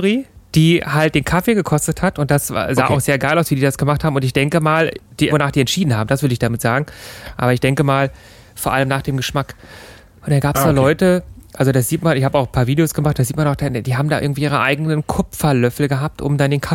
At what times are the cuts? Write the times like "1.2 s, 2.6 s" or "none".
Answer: 5.3 s